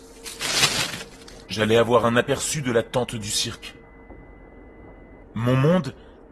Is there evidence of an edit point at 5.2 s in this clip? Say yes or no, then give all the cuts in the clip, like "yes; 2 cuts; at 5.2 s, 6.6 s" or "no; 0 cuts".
yes; 2 cuts; at 1.5 s, 5.2 s